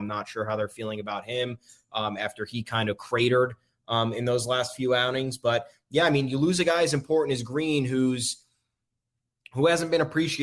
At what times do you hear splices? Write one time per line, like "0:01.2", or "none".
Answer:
none